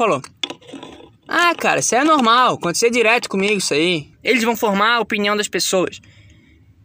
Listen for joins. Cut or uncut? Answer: cut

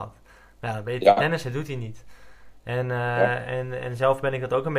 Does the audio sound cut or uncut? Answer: uncut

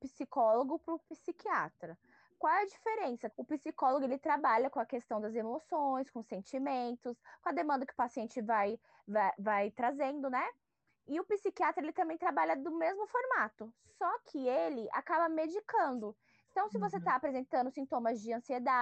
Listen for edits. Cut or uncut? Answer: cut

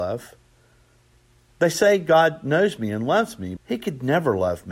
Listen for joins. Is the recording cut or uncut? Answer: cut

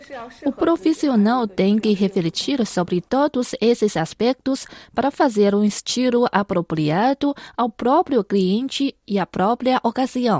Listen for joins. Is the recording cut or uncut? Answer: uncut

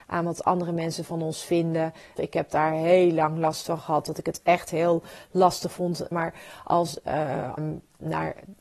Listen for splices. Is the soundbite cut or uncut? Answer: cut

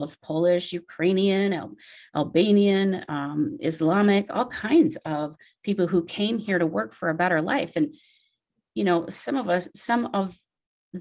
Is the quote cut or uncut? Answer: uncut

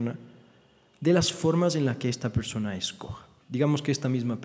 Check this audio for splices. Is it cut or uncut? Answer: cut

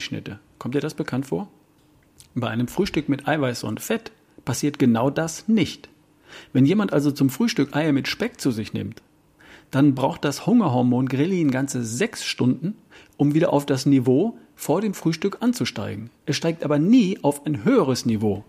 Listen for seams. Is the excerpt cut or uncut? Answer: uncut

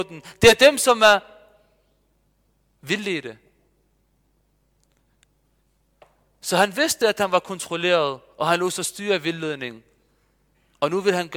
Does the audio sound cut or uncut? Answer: uncut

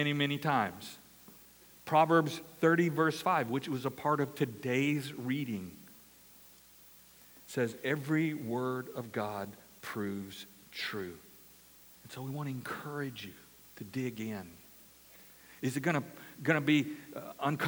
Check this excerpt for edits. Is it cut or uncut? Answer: cut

